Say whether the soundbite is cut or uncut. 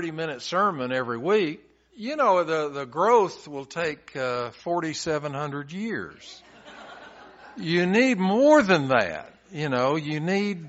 cut